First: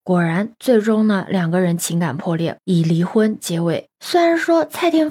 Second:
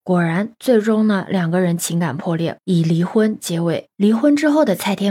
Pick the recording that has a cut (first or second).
first